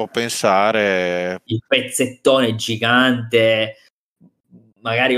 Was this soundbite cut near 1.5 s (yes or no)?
yes